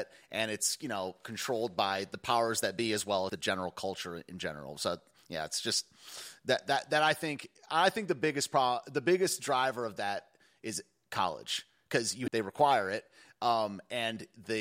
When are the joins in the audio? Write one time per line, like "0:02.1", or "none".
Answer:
0:03.3
0:12.3

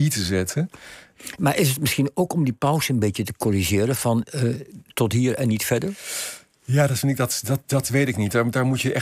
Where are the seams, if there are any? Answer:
0:04.9

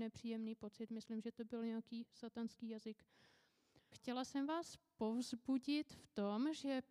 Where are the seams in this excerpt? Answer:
0:03.9

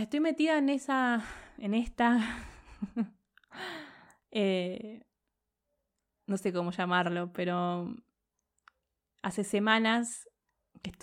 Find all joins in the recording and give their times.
none

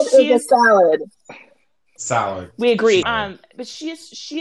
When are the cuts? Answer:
0:02.0
0:03.0

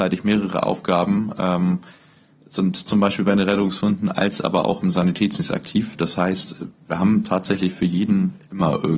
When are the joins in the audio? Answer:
none

